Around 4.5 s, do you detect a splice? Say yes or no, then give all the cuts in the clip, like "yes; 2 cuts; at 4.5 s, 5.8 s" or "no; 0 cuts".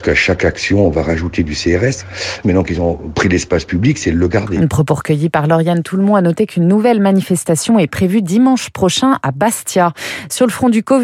no; 1 cut; at 2.4 s